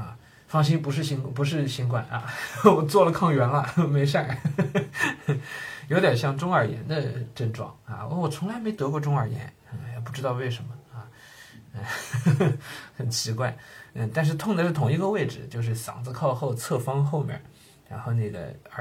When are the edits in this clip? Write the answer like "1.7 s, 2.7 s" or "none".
none